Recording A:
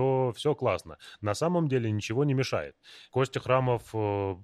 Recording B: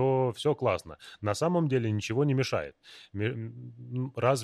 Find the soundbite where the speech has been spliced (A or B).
A